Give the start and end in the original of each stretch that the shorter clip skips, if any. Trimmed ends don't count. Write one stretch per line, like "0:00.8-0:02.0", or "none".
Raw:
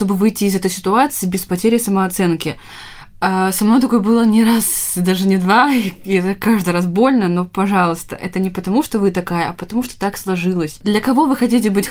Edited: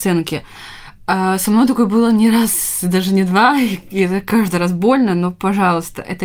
none